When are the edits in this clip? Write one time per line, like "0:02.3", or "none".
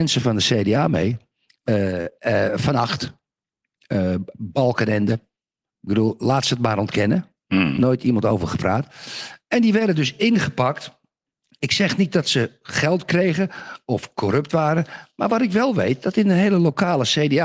none